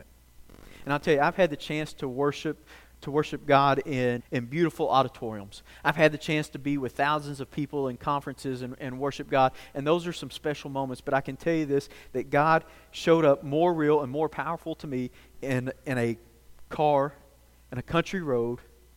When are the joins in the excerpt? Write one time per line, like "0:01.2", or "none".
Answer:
0:04.2